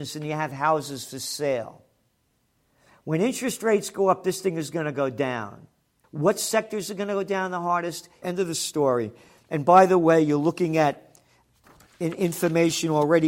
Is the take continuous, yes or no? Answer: no